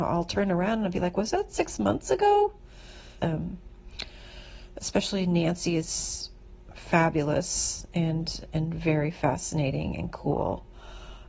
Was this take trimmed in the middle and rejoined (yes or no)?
yes